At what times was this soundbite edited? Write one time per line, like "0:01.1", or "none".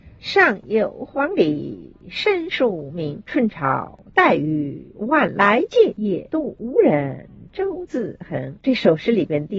none

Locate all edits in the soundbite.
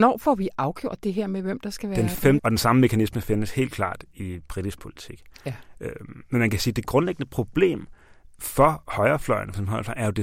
0:02.4

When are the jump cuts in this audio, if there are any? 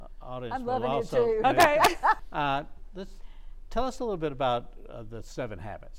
0:02.2

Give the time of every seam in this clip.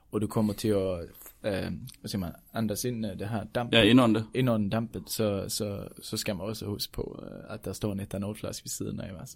none

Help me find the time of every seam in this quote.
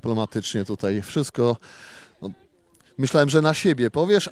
none

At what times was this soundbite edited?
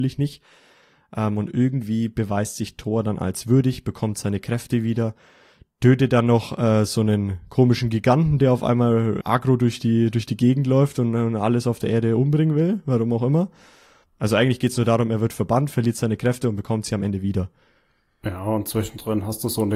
0:09.2
0:14.0

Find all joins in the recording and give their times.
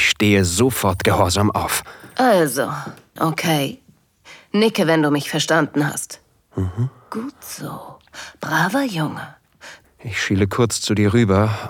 0:03.2
0:09.8

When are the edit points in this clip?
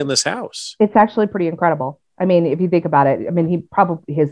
none

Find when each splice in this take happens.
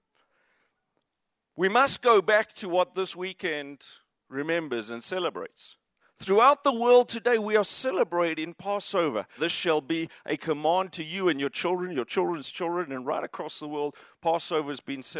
0:06.0
0:09.4

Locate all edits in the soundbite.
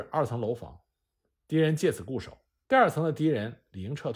0:02.6

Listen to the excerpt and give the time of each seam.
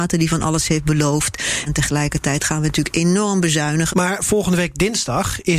0:01.7
0:03.9

